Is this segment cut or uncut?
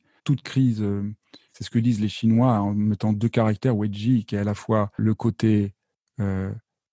cut